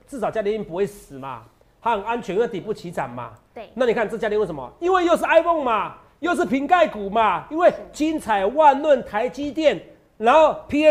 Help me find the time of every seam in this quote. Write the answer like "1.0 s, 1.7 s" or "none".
none